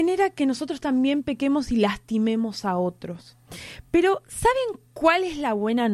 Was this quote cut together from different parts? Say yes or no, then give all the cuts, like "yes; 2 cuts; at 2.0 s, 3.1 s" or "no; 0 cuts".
no; 0 cuts